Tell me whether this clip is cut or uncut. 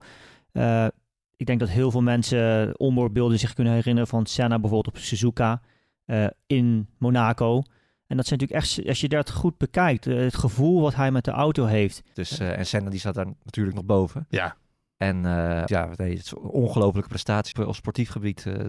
cut